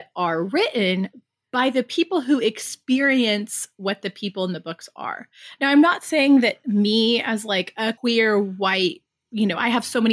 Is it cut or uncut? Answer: cut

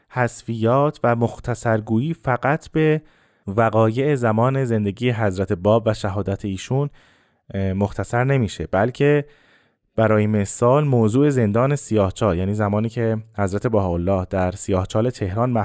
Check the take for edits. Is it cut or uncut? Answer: uncut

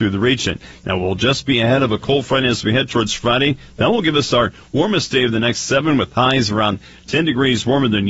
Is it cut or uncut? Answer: uncut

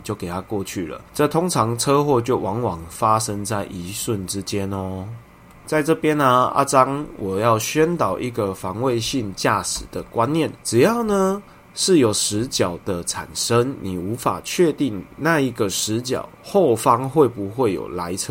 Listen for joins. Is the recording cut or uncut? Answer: uncut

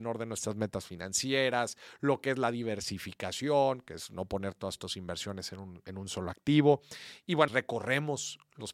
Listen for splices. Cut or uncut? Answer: cut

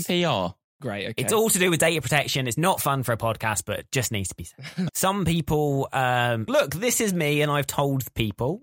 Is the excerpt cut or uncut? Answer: cut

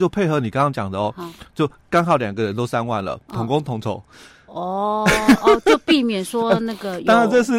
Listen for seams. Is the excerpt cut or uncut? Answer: uncut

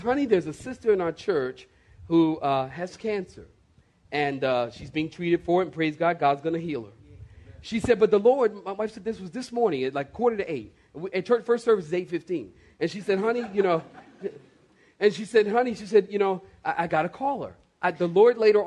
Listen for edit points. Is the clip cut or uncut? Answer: uncut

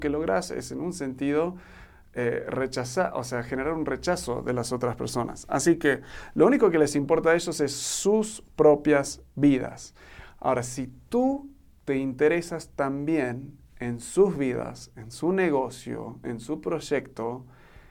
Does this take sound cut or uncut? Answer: uncut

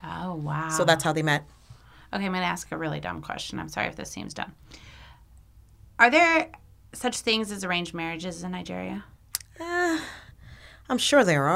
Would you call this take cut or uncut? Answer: uncut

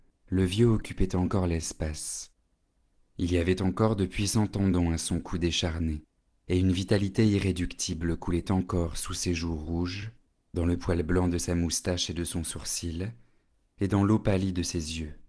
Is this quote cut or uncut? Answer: uncut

